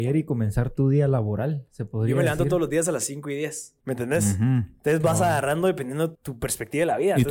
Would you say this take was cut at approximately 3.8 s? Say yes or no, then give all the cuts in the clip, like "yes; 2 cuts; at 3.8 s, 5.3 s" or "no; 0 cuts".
yes; 2 cuts; at 3.8 s, 6.1 s